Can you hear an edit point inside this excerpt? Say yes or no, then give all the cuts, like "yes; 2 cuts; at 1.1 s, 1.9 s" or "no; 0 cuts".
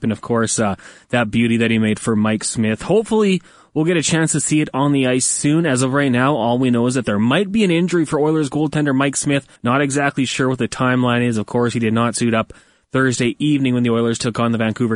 yes; 1 cut; at 9.6 s